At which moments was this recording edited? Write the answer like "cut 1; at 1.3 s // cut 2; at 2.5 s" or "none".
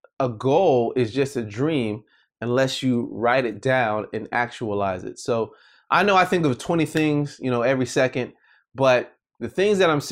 none